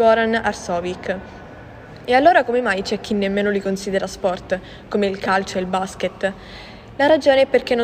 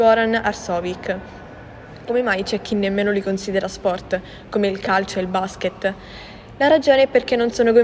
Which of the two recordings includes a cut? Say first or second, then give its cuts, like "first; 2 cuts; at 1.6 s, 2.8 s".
second; 1 cut; at 2.1 s